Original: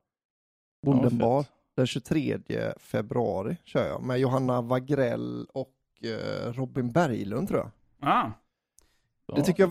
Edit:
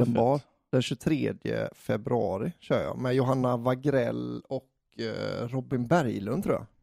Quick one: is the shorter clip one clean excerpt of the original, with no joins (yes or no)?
yes